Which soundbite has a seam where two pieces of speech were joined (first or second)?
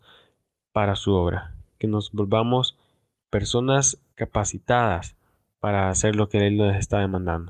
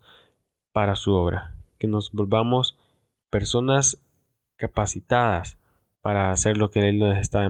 first